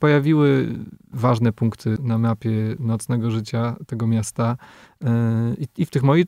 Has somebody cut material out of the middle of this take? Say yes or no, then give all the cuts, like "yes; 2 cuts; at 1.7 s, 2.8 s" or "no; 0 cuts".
yes; 1 cut; at 2.0 s